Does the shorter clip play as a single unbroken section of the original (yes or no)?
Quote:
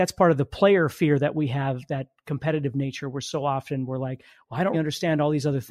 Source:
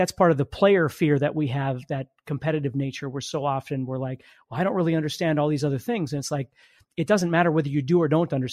no